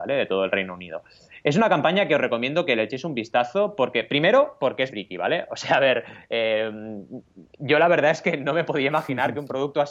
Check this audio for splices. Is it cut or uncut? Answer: cut